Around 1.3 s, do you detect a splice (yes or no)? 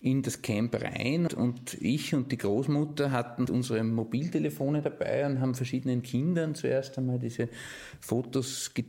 yes